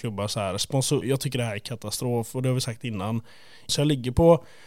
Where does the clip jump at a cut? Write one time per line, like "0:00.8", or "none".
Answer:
0:01.0
0:03.7

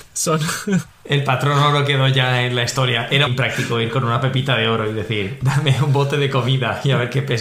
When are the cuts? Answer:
0:03.3

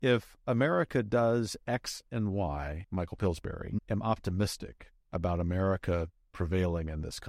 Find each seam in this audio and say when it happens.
0:02.8
0:05.0

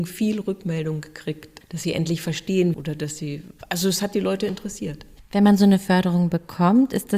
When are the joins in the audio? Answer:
0:01.6
0:02.7

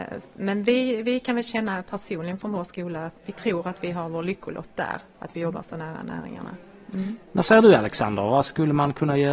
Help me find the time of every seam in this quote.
0:03.2

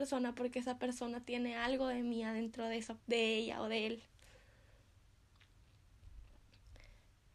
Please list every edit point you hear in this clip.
0:03.0

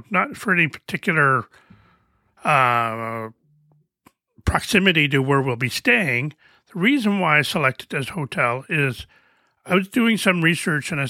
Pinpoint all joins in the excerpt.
none

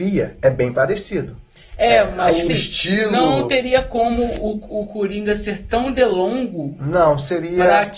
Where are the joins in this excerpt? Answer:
0:02.5

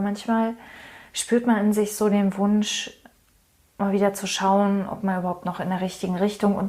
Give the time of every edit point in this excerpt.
none

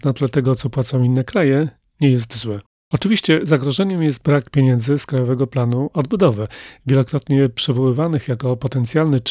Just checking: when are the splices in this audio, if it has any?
none

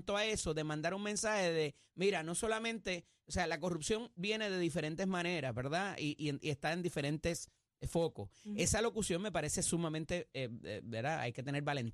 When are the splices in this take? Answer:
none

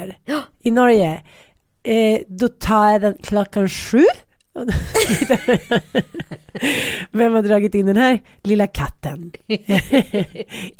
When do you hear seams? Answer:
none

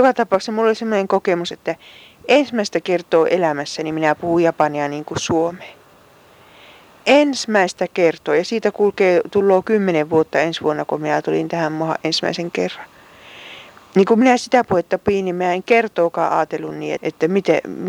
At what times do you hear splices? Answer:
0:17.0

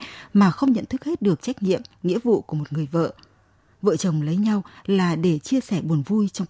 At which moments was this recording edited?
none

